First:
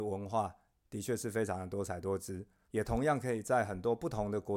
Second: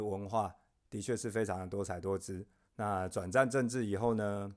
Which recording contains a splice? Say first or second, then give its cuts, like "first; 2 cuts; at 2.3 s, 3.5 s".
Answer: first; 1 cut; at 2.7 s